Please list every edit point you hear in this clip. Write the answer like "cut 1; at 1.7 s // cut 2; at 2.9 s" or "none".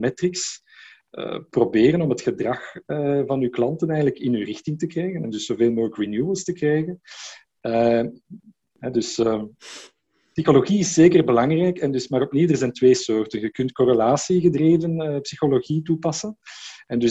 cut 1; at 8.7 s